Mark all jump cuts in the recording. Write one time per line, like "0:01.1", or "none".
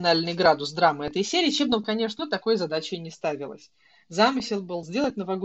0:02.2